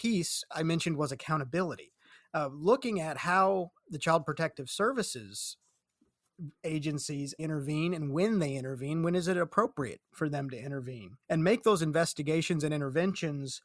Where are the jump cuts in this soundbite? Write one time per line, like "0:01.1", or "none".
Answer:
0:07.4
0:11.2